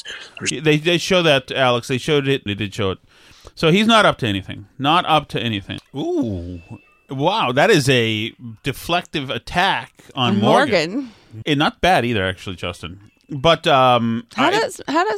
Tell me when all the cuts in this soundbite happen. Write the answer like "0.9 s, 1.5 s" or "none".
2.5 s, 5.8 s, 11.4 s